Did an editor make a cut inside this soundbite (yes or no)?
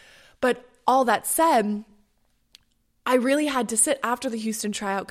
no